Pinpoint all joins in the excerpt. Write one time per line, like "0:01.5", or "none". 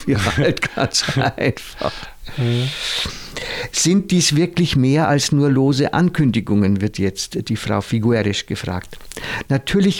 none